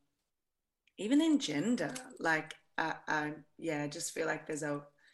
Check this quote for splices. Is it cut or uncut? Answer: uncut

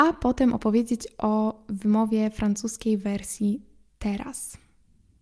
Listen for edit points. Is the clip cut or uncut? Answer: uncut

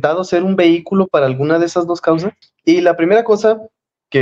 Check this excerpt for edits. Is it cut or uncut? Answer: cut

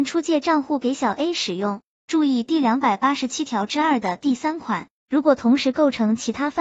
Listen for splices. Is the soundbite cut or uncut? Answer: cut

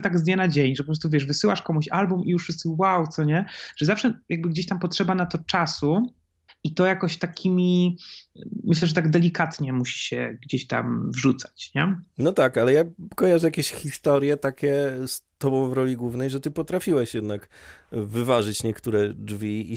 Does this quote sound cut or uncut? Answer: uncut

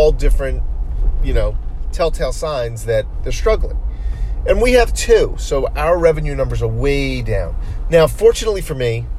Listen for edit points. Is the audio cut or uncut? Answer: uncut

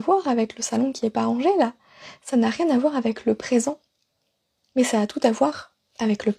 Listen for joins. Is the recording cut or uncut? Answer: uncut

